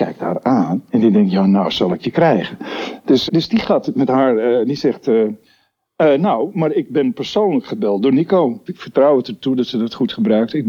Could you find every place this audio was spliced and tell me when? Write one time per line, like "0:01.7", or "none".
0:03.3
0:08.7